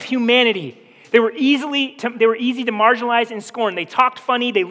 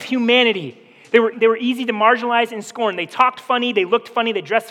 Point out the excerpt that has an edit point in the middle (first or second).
second